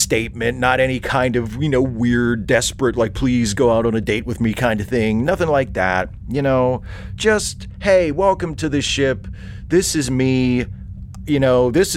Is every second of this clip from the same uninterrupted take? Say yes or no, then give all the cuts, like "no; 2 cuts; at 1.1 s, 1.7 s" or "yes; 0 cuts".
yes; 0 cuts